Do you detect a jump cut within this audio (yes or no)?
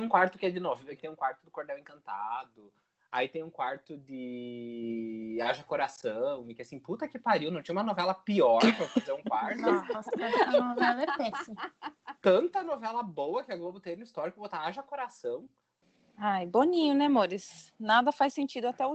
yes